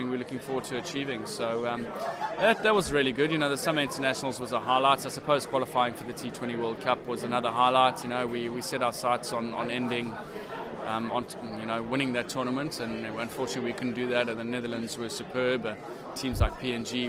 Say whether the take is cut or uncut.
cut